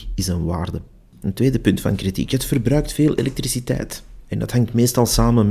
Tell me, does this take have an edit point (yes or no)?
no